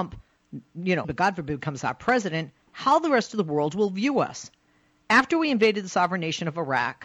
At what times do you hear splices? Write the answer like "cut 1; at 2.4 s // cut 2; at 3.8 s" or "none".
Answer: cut 1; at 1.0 s // cut 2; at 2.6 s